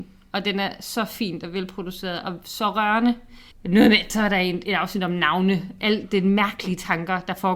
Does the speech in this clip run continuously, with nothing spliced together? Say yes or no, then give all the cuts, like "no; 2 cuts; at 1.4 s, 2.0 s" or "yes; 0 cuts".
no; 1 cut; at 3.5 s